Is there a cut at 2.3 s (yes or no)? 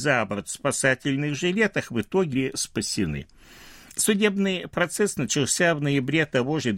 yes